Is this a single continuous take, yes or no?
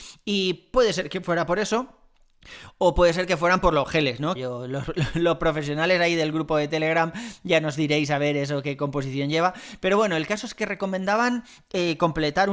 no